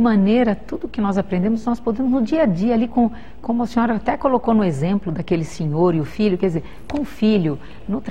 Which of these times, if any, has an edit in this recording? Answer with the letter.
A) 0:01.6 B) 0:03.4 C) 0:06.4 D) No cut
D